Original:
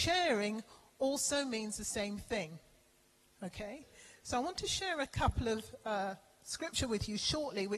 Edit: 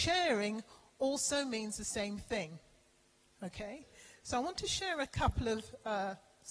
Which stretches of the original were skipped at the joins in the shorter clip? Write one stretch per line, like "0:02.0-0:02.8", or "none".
none